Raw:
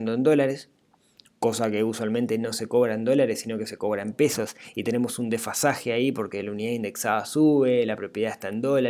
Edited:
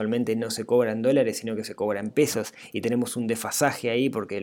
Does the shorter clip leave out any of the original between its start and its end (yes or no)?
no